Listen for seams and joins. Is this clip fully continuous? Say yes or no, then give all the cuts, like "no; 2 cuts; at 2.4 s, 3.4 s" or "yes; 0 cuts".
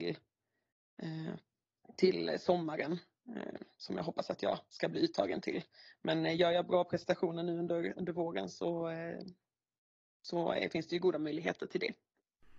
yes; 0 cuts